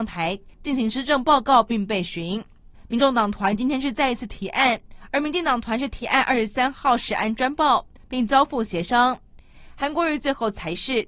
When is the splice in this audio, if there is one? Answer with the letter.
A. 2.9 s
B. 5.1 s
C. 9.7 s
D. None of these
B